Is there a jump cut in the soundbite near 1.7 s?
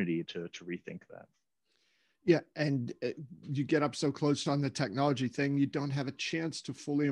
no; 1 cut; at 4.4 s

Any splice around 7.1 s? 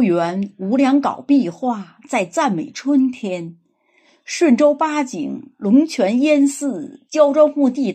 yes; 1 cut; at 7.1 s

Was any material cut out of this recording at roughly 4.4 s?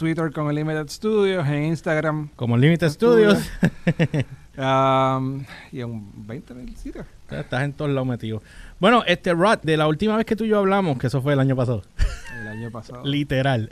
no; 2 cuts; at 2.3 s, 9.6 s

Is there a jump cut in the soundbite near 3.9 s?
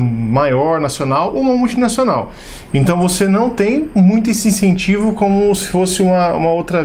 no; 1 cut; at 2.7 s

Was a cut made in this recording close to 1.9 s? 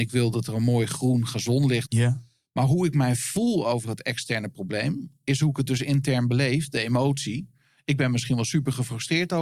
yes; 1 cut; at 1.9 s

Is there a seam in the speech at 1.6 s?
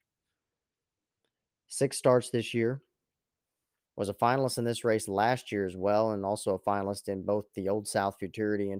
no; 1 cut; at 3.8 s

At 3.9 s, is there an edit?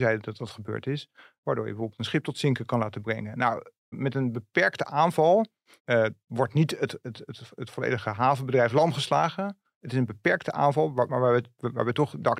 yes; 3 cuts; at 3.9 s, 5.8 s, 11.1 s

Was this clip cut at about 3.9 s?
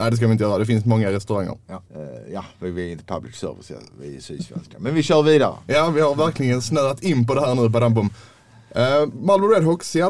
no; 1 cut; at 1.9 s

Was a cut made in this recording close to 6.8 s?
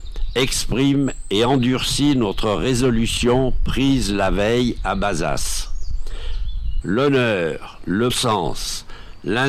yes; 2 cuts; at 6.8 s, 8.1 s

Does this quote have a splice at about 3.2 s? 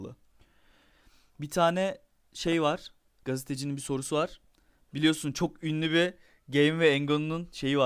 yes; 1 cut; at 3.2 s

